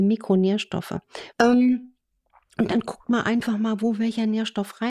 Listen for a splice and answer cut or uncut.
cut